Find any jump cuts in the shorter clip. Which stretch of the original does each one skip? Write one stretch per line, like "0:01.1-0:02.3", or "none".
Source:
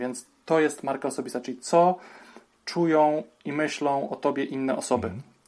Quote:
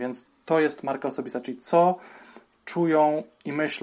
none